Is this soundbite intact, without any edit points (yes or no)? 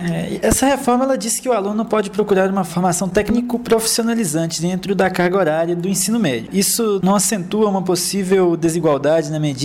no